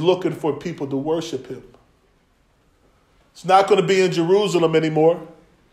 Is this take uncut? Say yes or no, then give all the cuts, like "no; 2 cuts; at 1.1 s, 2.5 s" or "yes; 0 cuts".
yes; 0 cuts